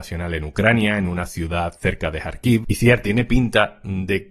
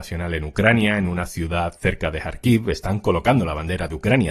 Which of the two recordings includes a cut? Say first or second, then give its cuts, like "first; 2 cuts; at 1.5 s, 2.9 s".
first; 1 cut; at 2.6 s